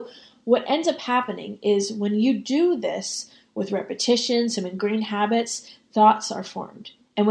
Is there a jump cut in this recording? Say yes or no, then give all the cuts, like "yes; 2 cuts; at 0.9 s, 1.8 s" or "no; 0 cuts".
yes; 1 cut; at 3.4 s